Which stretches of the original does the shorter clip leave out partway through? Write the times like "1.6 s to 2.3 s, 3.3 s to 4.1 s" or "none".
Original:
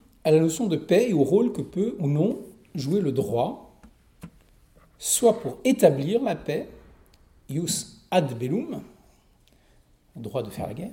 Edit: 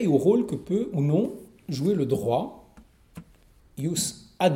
4.7 s to 7.3 s